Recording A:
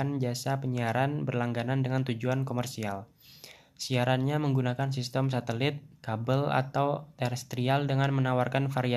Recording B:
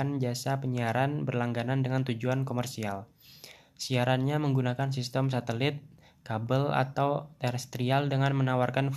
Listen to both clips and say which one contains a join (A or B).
A